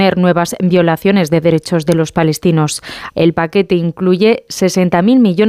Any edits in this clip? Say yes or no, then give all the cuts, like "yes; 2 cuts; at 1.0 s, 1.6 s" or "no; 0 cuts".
yes; 1 cut; at 3.1 s